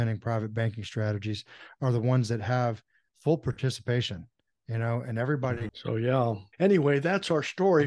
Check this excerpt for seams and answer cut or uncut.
cut